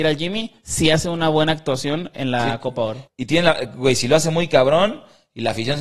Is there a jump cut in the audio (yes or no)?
yes